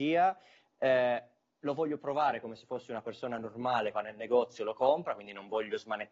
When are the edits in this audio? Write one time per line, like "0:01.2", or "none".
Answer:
0:03.9